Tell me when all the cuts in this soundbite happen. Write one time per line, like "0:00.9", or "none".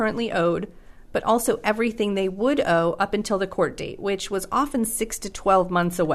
none